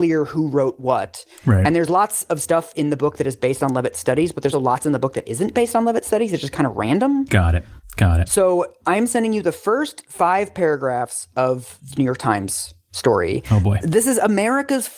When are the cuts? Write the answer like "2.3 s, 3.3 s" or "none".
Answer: 4.5 s